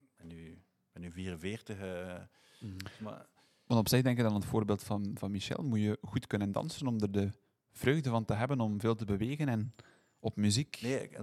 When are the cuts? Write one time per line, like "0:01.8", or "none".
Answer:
none